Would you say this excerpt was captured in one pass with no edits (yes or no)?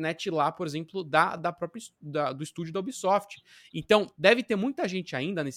yes